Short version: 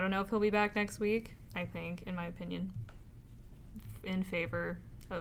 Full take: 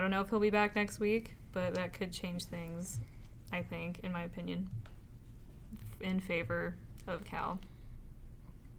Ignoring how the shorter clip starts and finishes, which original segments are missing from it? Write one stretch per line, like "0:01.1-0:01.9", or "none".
0:01.5-0:03.4